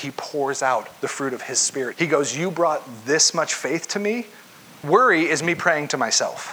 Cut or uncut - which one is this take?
cut